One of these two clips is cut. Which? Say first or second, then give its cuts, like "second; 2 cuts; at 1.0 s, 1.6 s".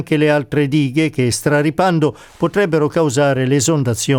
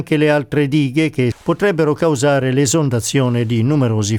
second; 1 cut; at 1.3 s